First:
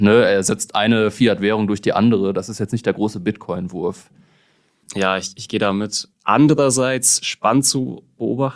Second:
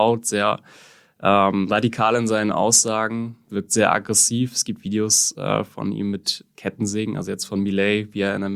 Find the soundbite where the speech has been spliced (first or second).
first